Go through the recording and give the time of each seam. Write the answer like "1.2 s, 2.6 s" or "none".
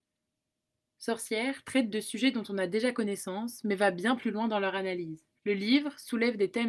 5.4 s